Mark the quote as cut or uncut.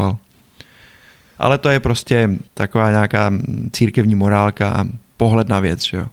cut